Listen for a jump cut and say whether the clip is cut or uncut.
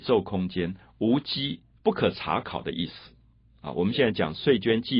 cut